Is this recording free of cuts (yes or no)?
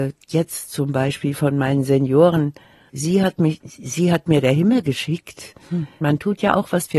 no